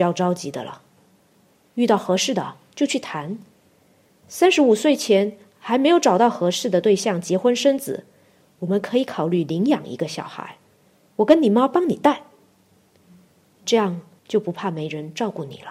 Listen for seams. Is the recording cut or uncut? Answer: cut